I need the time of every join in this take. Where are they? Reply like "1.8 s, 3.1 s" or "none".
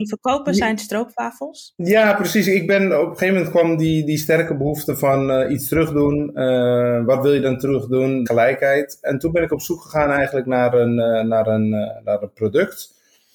8.3 s